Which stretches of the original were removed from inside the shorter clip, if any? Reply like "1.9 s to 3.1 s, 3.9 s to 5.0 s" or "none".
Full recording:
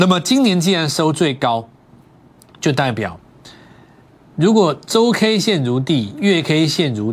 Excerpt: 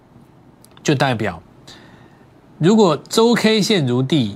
none